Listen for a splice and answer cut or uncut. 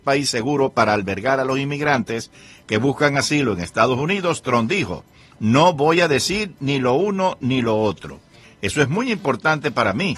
cut